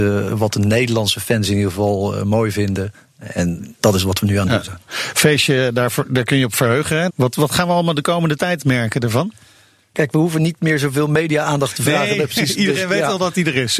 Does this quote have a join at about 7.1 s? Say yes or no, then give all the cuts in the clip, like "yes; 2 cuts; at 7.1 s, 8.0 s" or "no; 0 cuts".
yes; 2 cuts; at 7.1 s, 9.9 s